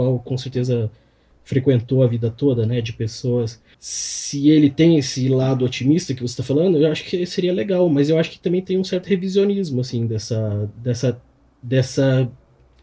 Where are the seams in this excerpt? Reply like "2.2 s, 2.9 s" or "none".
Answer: 3.7 s